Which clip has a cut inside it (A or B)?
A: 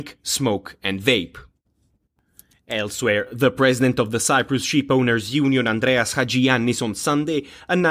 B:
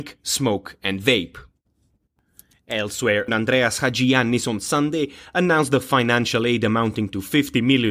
B